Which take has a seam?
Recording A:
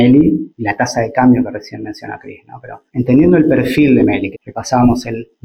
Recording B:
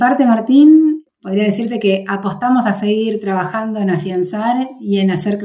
A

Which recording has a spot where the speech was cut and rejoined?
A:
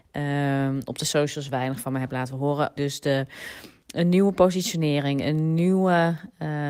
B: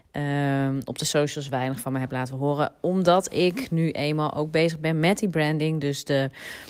A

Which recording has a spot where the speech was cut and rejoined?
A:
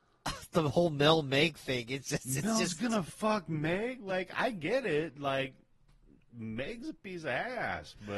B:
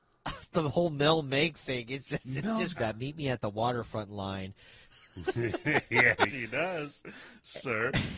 B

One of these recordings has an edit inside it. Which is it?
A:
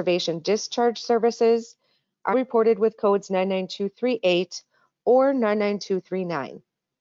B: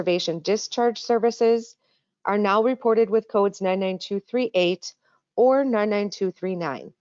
A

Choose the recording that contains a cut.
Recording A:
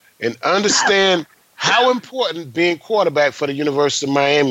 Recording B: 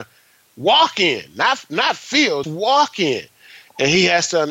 B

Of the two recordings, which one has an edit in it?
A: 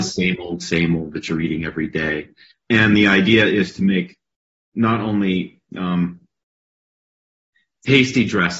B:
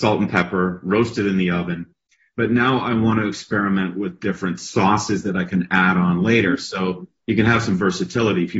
A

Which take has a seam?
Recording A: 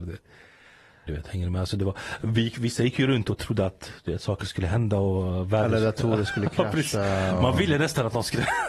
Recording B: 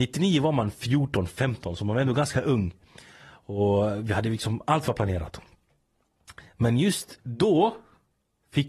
A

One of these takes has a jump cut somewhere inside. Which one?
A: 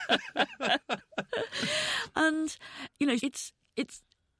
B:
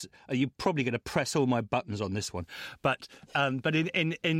A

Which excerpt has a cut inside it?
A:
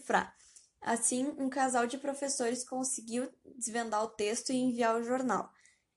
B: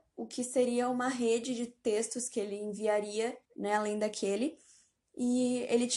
B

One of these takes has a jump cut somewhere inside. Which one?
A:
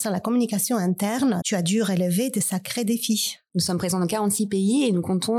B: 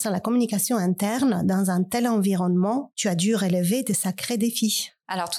A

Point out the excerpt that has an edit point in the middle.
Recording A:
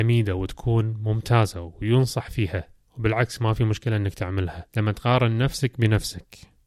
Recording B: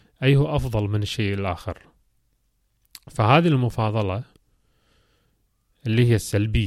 A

